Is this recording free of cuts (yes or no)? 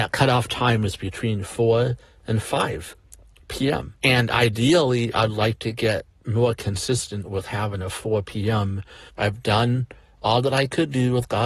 no